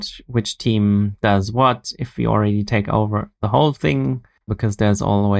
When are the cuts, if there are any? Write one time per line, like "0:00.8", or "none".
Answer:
0:04.5

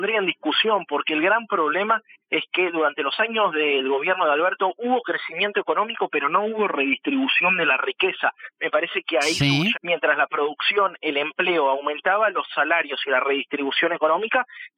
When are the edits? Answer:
0:09.7

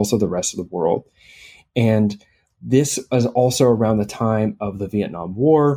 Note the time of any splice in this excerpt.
none

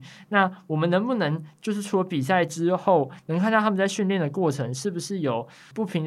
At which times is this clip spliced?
0:04.7

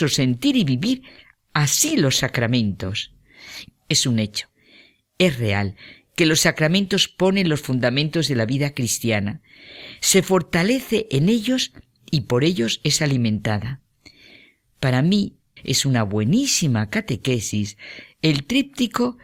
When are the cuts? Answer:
0:03.7
0:15.6

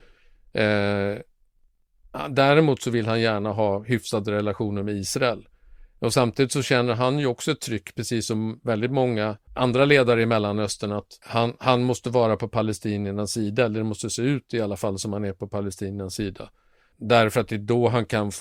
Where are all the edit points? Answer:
none

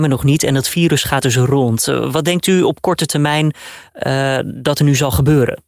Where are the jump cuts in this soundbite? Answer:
none

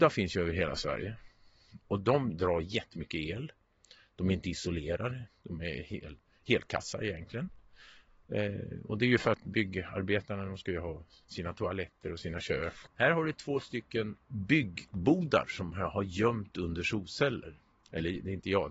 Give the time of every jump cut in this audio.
0:12.9
0:14.2

